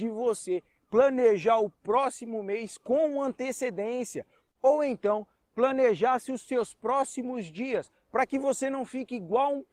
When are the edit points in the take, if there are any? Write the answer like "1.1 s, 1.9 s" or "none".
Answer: 4.5 s